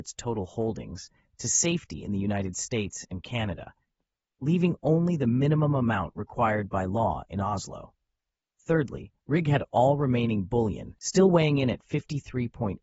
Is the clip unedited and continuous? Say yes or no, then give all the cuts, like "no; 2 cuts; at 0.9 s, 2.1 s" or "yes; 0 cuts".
yes; 0 cuts